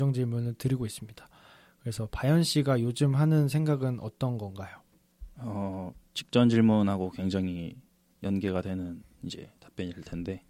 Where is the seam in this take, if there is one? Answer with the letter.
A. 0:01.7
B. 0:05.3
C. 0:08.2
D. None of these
D